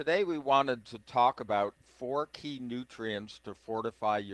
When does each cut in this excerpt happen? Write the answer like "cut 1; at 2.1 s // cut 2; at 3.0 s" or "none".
cut 1; at 1.8 s